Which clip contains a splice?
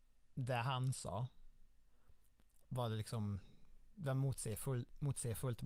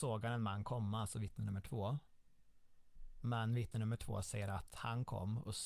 first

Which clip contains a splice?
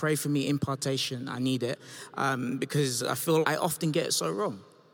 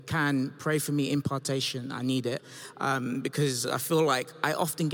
first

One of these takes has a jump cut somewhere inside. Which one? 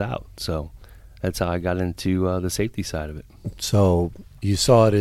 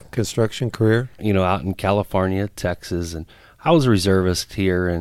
second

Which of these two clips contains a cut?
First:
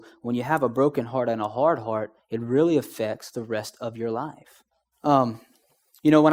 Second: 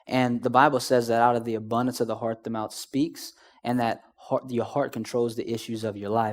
first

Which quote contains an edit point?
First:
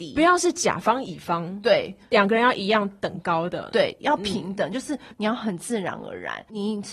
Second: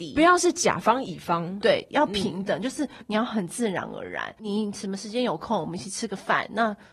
second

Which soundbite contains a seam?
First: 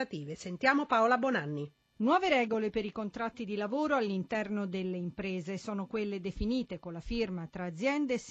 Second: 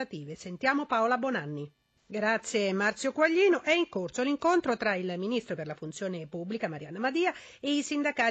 second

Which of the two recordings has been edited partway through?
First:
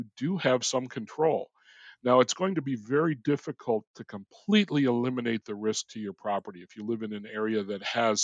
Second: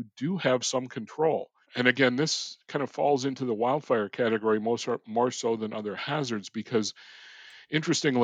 second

